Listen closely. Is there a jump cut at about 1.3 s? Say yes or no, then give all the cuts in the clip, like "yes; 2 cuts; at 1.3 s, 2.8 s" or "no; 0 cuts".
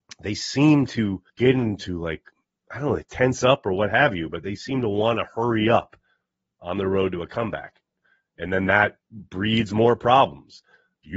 yes; 1 cut; at 1.3 s